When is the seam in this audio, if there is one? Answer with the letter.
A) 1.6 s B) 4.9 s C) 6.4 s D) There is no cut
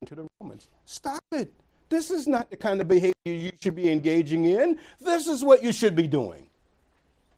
D